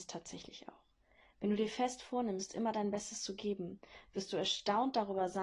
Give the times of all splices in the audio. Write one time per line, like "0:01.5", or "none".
none